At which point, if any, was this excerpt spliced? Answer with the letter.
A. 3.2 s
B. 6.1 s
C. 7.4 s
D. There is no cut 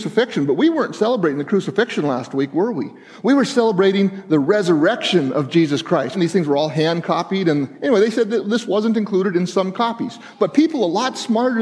B